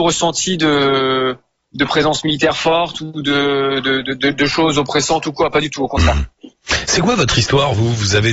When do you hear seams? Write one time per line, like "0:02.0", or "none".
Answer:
none